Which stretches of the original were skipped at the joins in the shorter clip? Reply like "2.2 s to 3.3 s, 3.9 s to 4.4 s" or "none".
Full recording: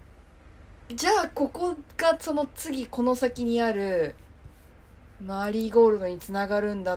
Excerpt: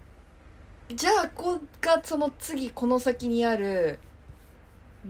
1.3 s to 1.5 s